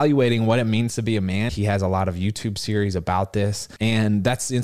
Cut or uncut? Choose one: cut